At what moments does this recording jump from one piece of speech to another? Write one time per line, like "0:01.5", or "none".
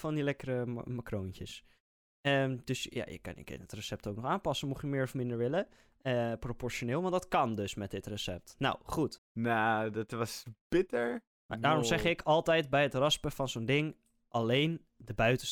0:09.2